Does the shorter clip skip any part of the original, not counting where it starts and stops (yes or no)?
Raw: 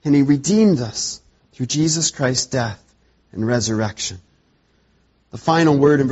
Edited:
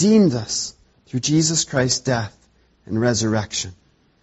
no